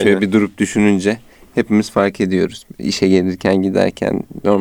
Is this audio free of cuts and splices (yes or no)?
yes